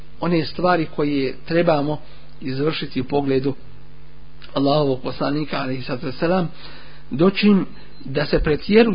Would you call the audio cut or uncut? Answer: uncut